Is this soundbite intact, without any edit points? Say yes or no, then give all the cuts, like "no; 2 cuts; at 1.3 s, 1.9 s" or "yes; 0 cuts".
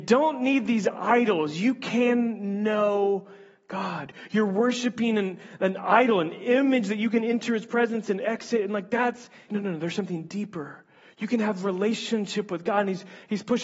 no; 1 cut; at 9.5 s